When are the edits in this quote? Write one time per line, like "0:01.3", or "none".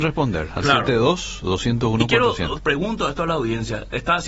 0:02.6